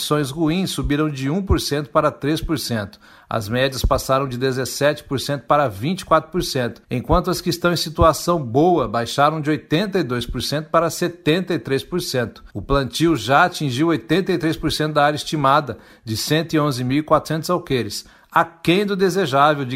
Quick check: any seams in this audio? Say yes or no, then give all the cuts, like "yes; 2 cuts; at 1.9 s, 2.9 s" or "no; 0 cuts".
yes; 2 cuts; at 6.8 s, 12.5 s